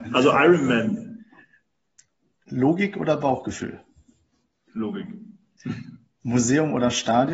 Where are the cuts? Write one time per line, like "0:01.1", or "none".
none